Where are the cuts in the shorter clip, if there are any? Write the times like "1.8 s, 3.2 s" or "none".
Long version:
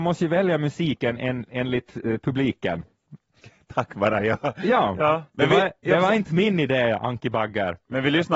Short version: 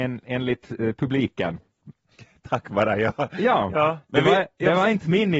none